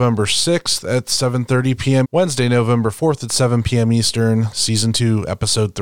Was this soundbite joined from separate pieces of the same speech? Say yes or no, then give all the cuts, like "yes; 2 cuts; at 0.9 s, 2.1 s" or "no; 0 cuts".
yes; 2 cuts; at 2.0 s, 4.5 s